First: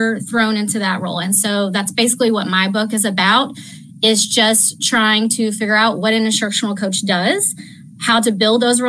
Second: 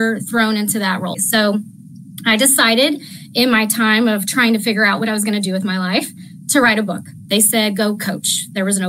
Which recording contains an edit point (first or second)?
second